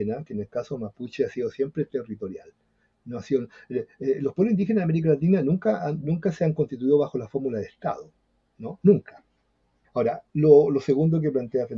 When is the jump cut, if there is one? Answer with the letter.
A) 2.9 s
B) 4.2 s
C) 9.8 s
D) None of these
C